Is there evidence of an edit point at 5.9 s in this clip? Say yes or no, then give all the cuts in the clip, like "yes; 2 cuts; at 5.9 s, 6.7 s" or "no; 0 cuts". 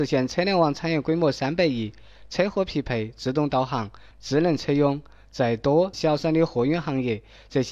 yes; 2 cuts; at 4.1 s, 5.9 s